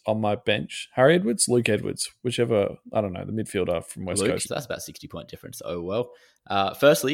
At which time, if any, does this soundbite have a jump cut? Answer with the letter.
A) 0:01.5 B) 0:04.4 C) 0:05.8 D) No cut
B